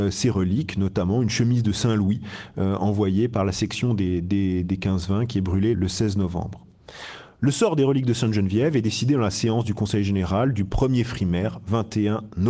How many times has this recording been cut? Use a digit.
1